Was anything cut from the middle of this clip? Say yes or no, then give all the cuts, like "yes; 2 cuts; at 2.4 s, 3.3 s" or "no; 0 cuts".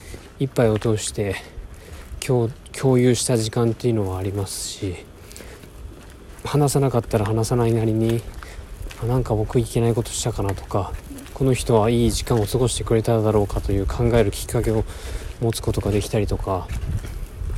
no; 0 cuts